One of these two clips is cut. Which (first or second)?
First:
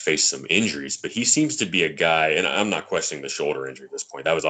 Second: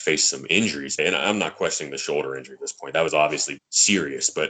second